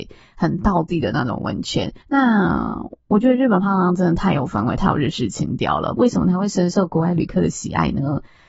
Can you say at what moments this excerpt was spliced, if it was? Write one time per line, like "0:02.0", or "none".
0:02.0
0:06.0